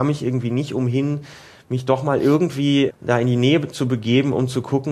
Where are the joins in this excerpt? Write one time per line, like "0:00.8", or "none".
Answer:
0:02.9